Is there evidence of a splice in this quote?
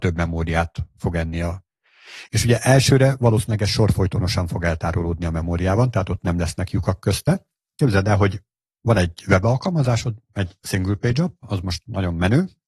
yes; 2 cuts; at 2.2 s, 7.7 s

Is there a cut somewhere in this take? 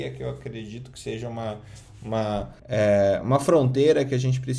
yes; 1 cut; at 2.6 s

